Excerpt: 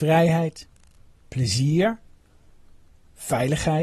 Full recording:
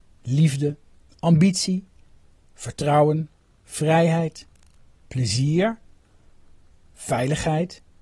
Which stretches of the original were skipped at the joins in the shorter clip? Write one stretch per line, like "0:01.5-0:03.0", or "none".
none